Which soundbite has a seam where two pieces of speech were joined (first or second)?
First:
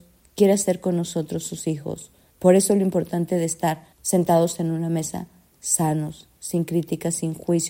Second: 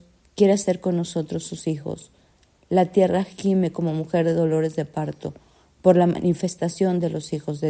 first